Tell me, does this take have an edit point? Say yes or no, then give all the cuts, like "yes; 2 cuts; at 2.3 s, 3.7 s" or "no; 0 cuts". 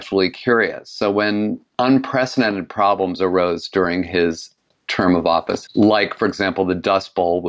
yes; 2 cuts; at 1.7 s, 5.7 s